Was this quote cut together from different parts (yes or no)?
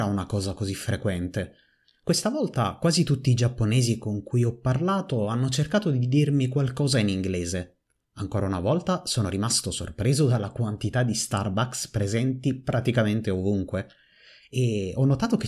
yes